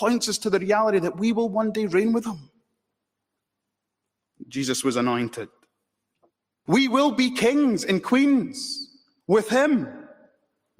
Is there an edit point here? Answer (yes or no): yes